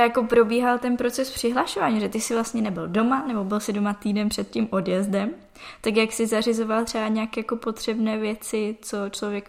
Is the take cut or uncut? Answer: uncut